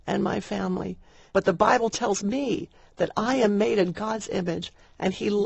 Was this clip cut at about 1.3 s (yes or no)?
yes